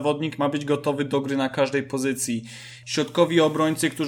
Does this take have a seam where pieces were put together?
yes; 1 cut; at 2.8 s

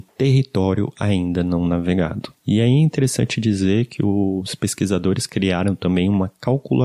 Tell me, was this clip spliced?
yes; 1 cut; at 2.4 s

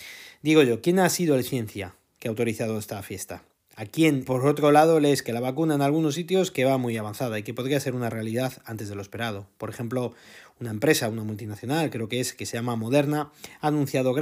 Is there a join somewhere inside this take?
yes; 1 cut; at 4.3 s

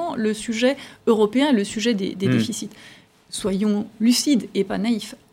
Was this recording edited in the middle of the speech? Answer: no; 0 cuts

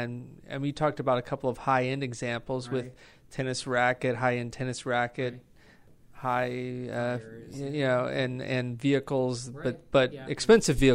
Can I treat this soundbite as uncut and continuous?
yes; 0 cuts

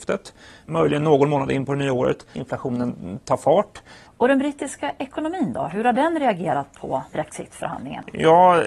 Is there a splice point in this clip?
yes; 2 cuts; at 2.3 s, 4.1 s

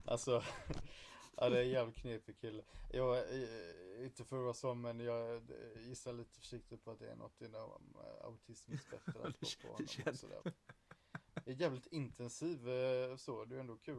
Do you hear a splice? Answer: yes; 2 cuts; at 10.4 s, 11.4 s

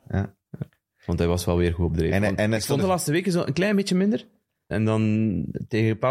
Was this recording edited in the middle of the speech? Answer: yes; 2 cuts; at 2.8 s, 4.7 s

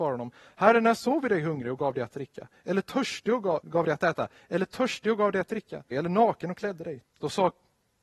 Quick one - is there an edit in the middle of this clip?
yes; 3 cuts; at 3.6 s, 5.9 s, 7.0 s

